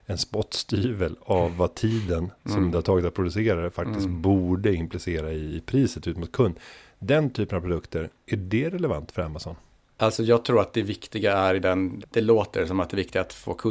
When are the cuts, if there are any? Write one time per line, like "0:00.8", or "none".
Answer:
0:12.0